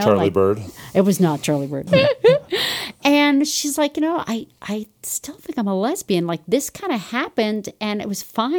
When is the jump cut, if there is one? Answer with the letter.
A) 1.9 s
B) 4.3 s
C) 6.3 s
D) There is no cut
A